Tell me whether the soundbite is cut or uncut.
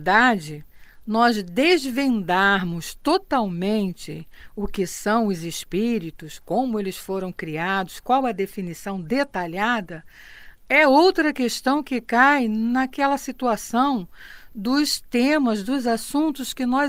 uncut